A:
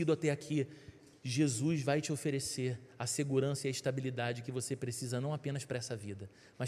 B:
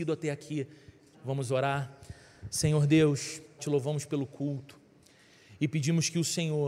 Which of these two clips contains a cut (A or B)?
B